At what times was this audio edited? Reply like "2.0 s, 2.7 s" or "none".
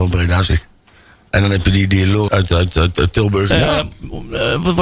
2.3 s, 3.5 s